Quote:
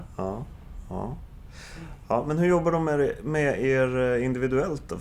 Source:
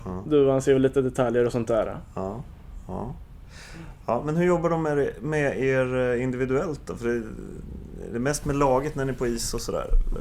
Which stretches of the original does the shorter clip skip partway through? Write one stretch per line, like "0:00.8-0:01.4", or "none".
none

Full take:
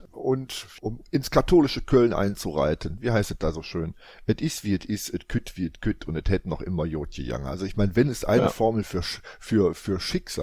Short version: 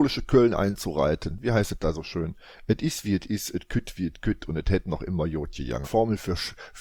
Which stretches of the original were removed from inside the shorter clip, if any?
0:07.4-0:08.5

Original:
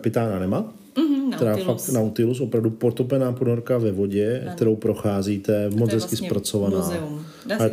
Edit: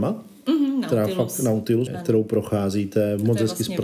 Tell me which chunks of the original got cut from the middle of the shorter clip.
0:02.4-0:04.4

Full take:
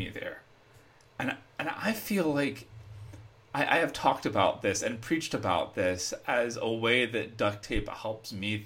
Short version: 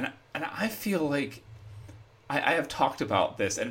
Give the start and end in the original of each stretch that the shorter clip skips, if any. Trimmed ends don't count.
none

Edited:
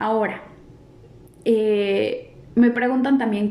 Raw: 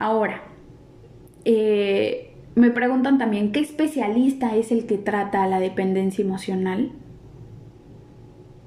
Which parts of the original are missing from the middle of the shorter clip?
none

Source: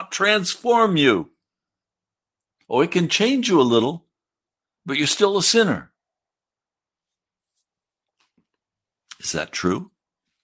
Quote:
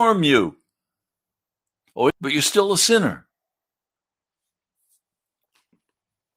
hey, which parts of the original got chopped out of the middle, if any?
0:02.8-0:04.8

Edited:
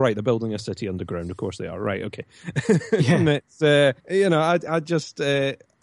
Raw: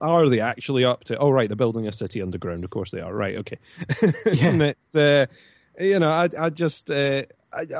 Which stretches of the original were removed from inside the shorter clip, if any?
0:05.3-0:05.7

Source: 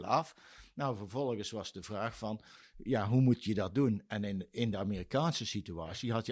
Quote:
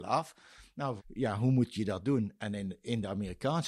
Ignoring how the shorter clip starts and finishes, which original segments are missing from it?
0:01.0-0:02.7

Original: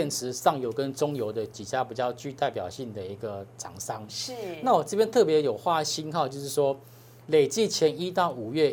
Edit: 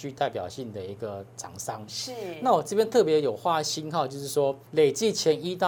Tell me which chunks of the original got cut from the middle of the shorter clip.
0:06.8-0:07.2

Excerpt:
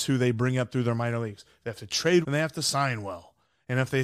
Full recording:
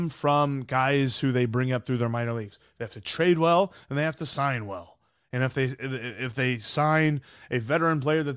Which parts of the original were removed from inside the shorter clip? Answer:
0:03.4-0:03.8

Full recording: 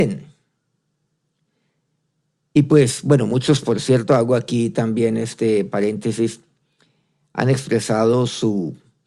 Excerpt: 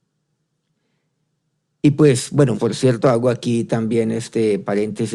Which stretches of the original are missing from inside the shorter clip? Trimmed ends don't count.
0:03.3-0:03.6

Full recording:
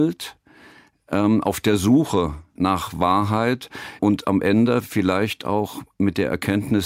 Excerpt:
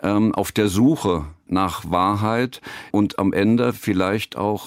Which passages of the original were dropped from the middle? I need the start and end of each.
none

